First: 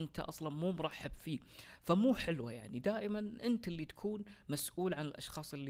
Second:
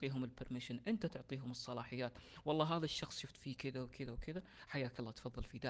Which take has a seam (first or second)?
second